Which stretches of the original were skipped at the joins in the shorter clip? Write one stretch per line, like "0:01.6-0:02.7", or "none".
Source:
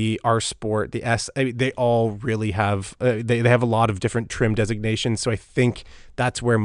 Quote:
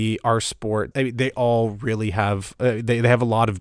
0:00.9-0:01.3